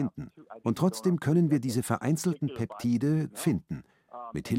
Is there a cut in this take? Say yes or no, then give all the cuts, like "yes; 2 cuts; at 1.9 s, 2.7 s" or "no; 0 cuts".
yes; 1 cut; at 3.3 s